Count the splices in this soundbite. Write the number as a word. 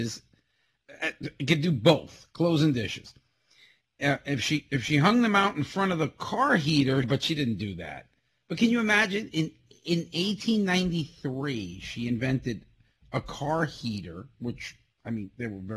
one